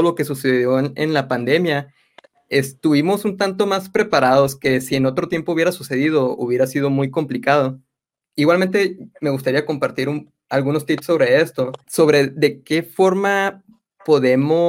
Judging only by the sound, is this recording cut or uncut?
cut